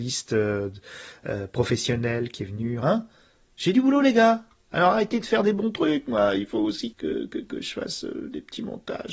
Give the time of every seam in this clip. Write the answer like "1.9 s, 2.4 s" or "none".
2.8 s, 6.9 s